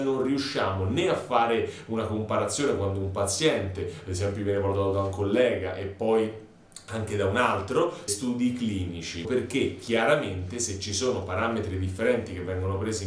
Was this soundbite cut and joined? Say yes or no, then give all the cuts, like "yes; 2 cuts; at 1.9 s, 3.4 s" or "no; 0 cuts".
yes; 2 cuts; at 8.1 s, 9.2 s